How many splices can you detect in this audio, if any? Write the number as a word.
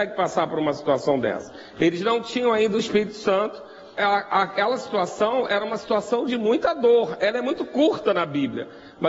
one